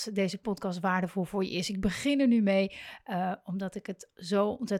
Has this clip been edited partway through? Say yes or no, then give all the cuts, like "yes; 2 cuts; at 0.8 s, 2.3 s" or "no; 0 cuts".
no; 0 cuts